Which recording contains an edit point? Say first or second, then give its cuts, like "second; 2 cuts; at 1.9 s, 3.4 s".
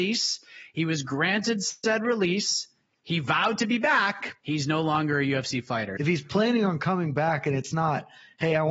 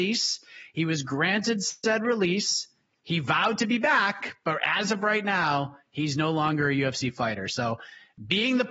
first; 2 cuts; at 4.4 s, 6.0 s